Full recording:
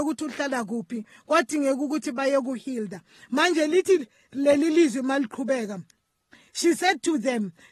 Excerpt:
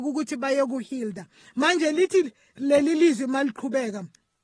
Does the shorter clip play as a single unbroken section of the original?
yes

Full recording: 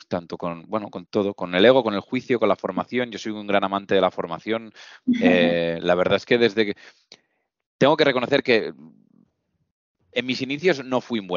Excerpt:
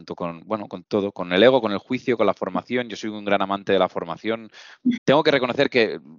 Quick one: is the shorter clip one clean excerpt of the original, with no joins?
no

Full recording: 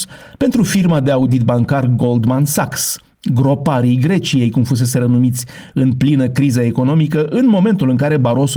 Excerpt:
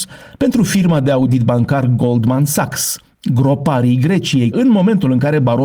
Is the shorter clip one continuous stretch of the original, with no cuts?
no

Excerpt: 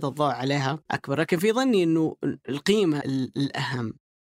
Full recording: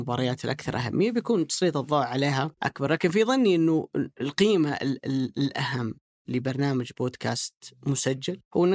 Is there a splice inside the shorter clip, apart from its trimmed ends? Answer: yes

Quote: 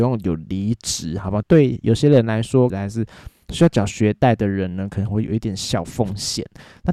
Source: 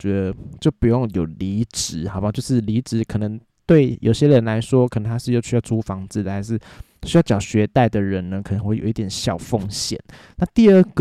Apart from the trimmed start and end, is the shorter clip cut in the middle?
yes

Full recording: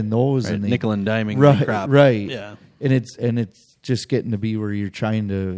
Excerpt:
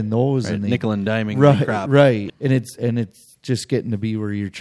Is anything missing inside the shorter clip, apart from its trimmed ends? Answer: yes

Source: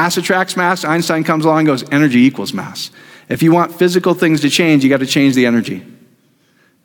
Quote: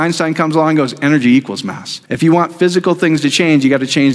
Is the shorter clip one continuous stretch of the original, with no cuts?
no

